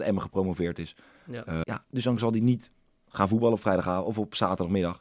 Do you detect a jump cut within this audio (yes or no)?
yes